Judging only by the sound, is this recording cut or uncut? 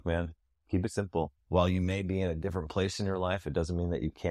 cut